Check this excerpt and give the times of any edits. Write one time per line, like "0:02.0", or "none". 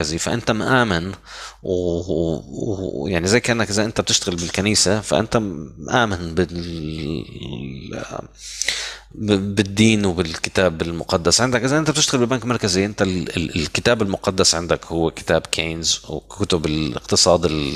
none